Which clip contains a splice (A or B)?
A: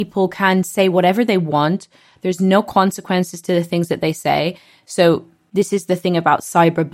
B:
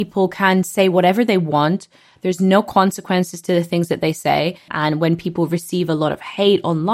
B